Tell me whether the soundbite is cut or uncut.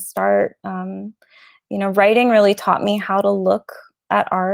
uncut